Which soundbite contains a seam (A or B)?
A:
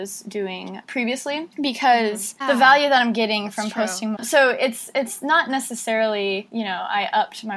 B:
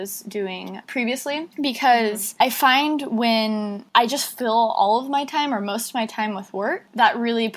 A